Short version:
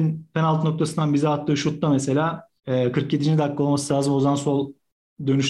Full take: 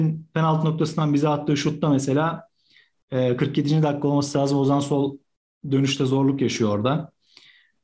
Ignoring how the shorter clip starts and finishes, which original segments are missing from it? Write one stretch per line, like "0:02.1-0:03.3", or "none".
0:02.6-0:03.0